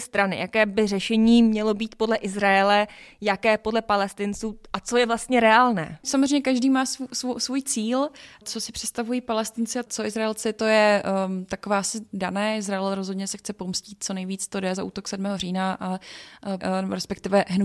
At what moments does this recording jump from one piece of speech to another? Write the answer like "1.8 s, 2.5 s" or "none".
14.8 s, 16.6 s

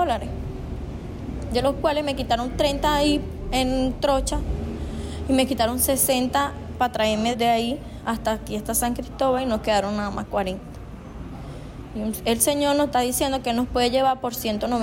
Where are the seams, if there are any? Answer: 7.3 s

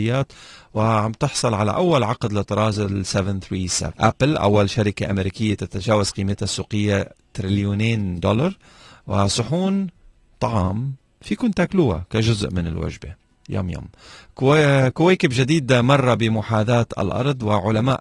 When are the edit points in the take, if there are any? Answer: none

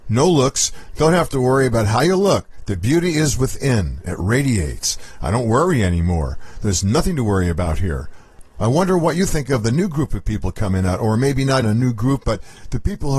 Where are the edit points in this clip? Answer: 11.6 s

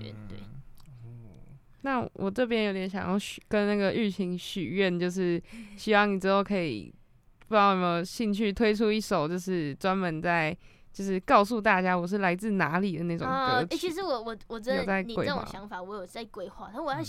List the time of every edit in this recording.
none

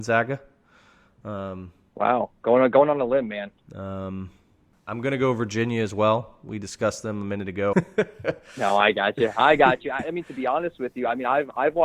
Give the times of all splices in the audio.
3.6 s, 7.7 s

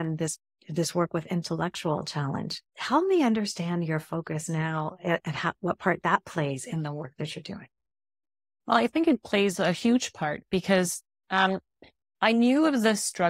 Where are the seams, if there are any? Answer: 2.7 s, 5.2 s

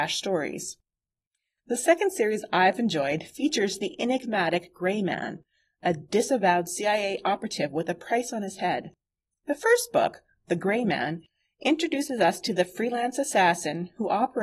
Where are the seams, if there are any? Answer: none

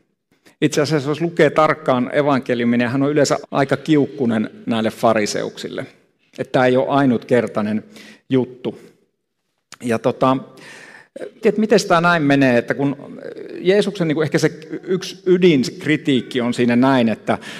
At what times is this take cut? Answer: 3.4 s, 11.4 s

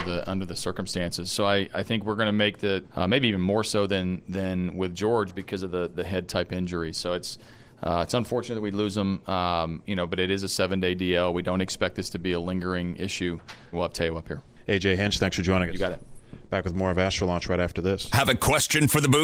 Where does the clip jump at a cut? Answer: 2.8 s, 13.7 s

